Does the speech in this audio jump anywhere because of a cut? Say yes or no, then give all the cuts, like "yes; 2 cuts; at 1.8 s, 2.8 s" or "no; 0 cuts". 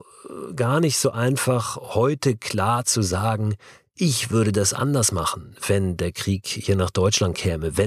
no; 0 cuts